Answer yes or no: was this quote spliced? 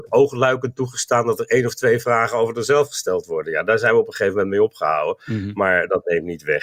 no